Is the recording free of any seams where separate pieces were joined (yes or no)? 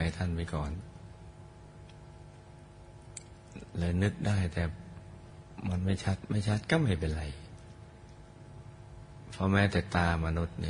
yes